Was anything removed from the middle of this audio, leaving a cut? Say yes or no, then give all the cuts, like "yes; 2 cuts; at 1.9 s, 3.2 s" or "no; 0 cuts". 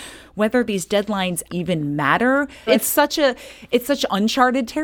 yes; 2 cuts; at 1.5 s, 2.7 s